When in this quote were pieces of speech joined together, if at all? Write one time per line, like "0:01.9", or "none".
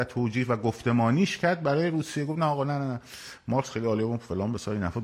none